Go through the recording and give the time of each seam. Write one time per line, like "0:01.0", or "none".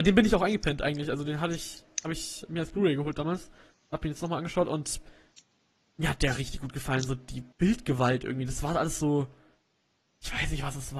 0:07.5

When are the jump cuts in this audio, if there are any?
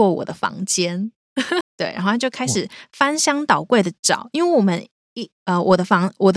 0:01.6

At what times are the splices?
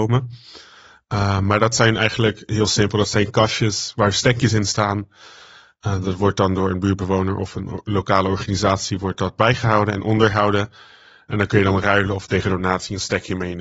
none

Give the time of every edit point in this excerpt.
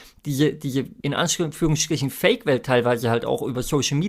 0:01.0

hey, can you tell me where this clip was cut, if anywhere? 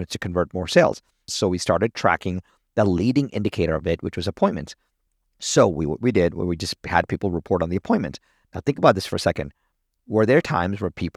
0:01.3

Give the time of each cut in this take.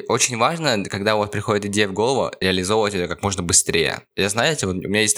0:04.1

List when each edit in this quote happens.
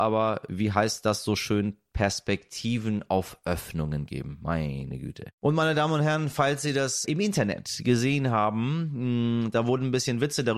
0:05.3
0:07.0

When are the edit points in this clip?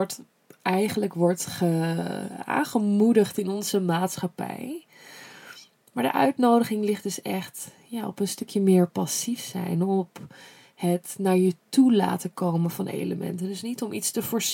none

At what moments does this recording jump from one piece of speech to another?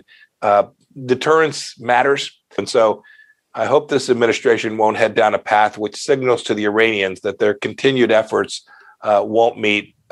0:02.6

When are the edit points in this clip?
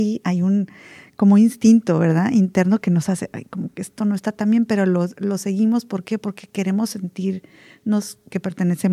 none

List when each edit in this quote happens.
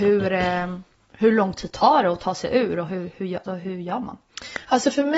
0:03.4

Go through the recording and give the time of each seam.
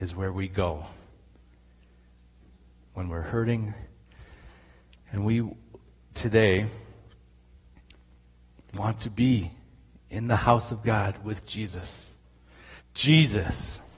0:12.8

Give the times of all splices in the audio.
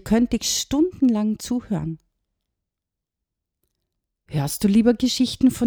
none

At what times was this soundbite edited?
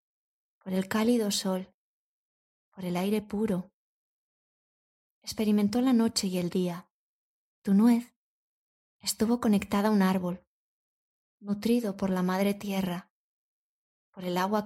0:07.5

